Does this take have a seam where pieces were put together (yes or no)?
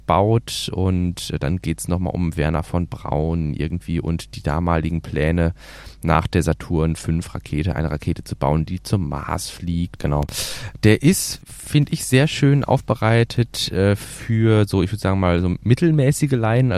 yes